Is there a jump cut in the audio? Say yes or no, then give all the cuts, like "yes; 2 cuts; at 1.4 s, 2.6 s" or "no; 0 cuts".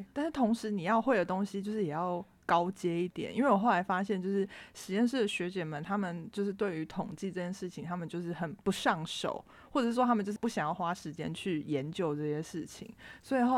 no; 0 cuts